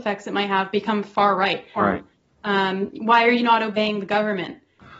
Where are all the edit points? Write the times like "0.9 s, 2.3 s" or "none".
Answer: 1.8 s